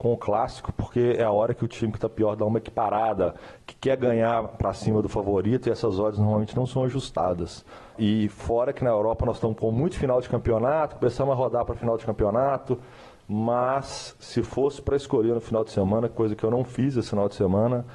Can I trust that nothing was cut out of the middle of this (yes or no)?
yes